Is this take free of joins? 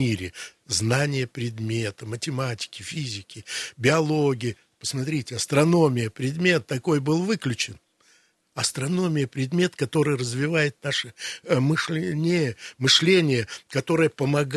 yes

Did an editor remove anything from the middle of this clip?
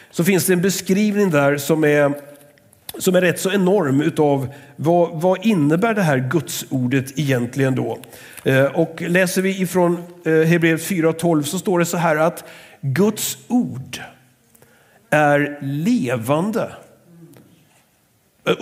no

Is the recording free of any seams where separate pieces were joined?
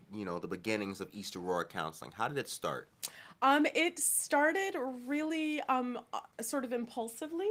yes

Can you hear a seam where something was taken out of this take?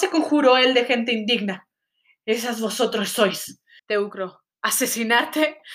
yes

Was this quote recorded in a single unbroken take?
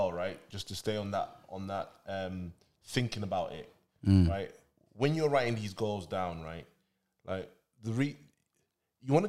yes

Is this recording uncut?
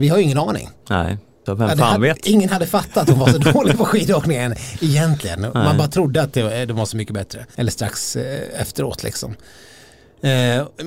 no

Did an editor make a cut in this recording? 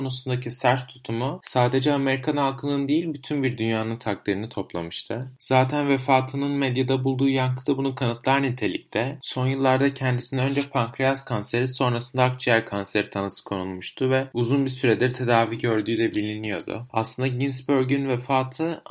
yes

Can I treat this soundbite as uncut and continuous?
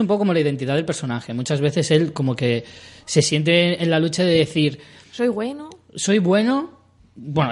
yes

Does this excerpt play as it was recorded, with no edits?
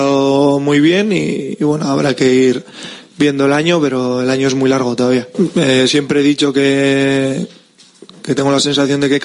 yes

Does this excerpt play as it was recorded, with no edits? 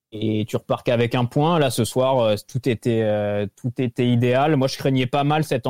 yes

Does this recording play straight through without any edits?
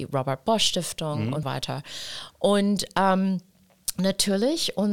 no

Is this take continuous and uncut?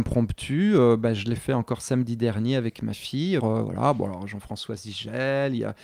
no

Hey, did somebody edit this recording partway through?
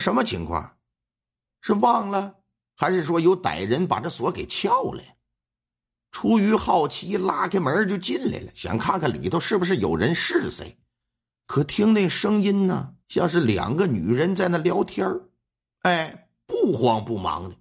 yes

